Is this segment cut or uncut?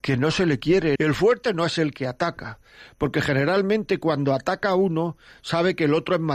cut